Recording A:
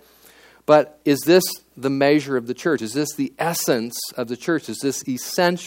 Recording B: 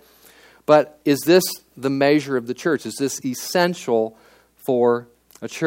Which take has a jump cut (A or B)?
B